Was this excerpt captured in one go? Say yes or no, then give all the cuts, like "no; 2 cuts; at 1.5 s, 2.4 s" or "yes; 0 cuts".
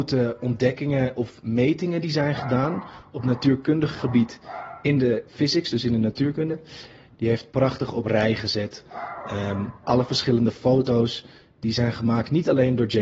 no; 2 cuts; at 5.3 s, 7.2 s